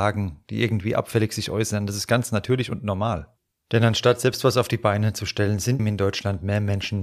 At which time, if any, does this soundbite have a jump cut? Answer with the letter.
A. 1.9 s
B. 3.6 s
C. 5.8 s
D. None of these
C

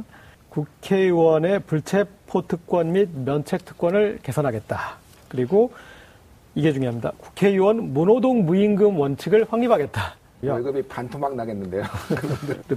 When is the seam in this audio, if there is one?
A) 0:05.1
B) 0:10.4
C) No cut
B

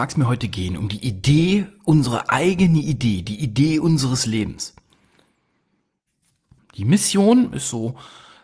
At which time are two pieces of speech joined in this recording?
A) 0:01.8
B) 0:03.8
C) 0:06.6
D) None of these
C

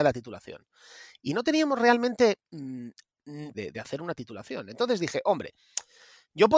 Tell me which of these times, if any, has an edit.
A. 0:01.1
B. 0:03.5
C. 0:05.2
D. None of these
B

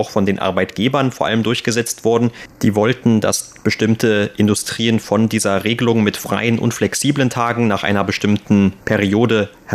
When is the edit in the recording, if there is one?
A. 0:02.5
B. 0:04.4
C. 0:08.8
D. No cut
C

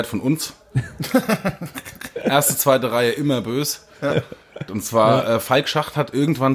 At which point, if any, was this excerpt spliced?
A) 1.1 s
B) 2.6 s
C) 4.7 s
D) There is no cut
C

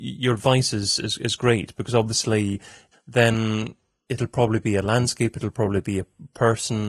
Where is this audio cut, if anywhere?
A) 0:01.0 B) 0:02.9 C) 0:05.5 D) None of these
B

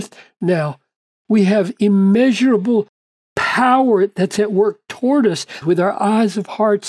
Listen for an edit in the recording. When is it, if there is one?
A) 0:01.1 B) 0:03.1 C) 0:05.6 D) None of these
C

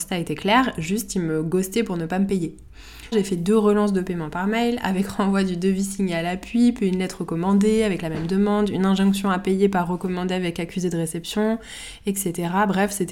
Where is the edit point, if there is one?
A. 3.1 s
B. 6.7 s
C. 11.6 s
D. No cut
A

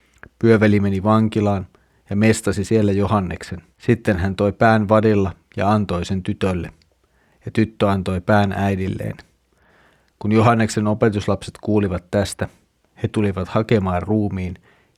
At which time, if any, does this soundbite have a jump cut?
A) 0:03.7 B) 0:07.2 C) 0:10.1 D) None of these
A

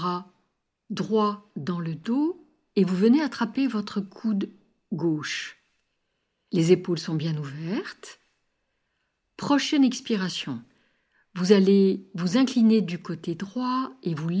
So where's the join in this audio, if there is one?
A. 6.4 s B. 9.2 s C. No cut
C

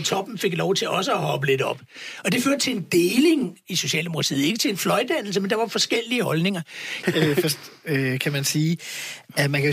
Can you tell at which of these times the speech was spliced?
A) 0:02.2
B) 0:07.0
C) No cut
B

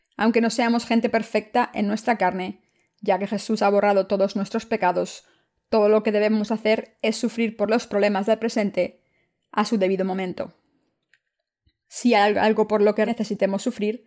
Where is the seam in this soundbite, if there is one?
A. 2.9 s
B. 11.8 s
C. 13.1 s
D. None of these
C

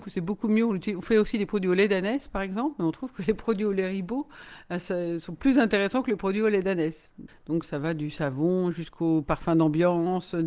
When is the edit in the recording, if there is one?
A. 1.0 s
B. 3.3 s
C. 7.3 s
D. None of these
C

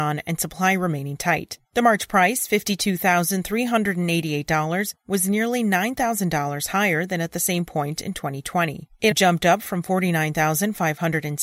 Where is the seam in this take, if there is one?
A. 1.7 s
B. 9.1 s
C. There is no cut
B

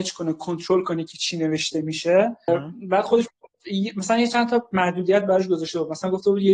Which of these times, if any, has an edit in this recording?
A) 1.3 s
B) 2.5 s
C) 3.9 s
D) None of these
B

